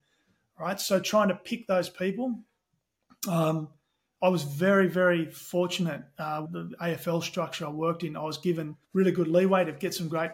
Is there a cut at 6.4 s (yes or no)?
yes